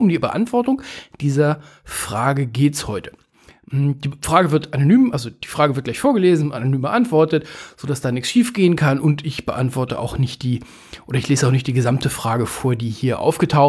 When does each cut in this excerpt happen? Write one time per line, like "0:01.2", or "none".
none